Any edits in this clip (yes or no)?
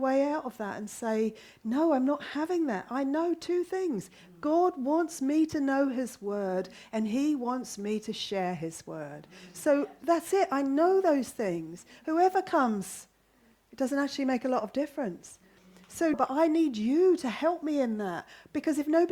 yes